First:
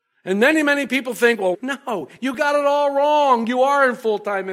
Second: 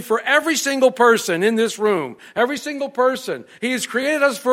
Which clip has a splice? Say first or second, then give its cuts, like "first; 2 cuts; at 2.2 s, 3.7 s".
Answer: first; 1 cut; at 1.5 s